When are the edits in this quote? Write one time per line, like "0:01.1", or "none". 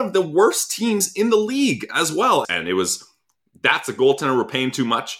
0:02.4